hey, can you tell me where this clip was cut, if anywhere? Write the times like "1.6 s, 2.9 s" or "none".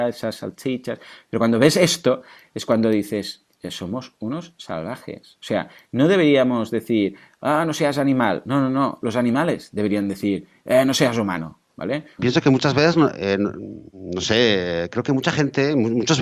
12.2 s